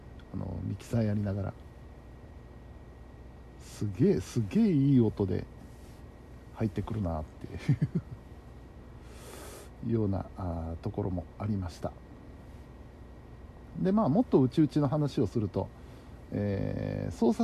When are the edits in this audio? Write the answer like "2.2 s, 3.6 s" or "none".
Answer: none